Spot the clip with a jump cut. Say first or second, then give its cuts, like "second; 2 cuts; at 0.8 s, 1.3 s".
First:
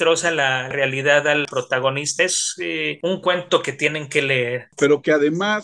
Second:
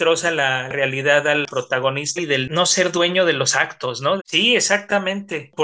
second; 2 cuts; at 2.2 s, 4.2 s